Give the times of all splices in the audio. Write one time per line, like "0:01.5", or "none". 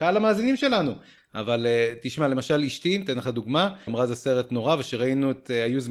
0:01.2
0:03.9